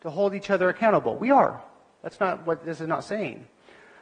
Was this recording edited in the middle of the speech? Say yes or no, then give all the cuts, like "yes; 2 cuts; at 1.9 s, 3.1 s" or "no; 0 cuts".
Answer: no; 0 cuts